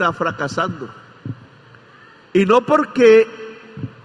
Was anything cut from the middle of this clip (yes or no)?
no